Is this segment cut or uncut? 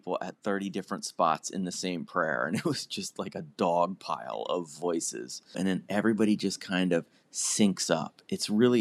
cut